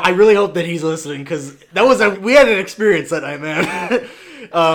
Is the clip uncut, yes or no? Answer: no